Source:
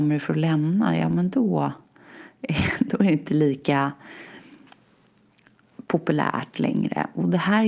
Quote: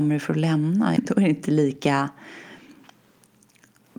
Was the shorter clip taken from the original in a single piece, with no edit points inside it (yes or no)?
no